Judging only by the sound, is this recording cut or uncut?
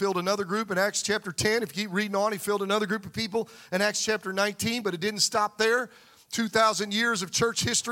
uncut